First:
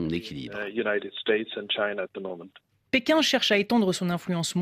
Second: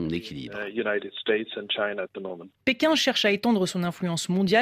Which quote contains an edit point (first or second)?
second